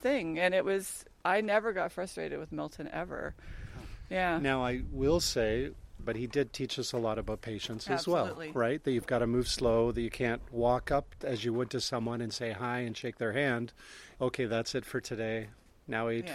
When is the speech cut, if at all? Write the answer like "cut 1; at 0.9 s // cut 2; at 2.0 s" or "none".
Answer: cut 1; at 6.1 s // cut 2; at 14.1 s

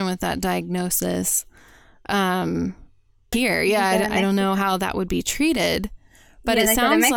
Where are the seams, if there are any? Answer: cut 1; at 3.3 s

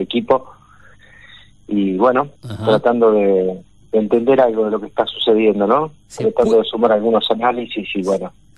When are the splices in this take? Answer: cut 1; at 2.4 s

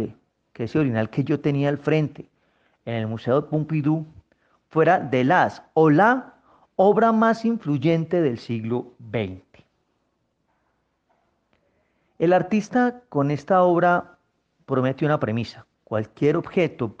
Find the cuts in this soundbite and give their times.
cut 1; at 15.7 s

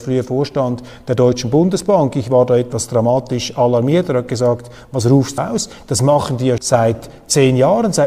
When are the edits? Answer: cut 1; at 5.4 s // cut 2; at 6.6 s

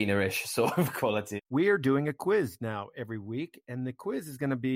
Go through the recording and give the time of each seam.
cut 1; at 1.4 s

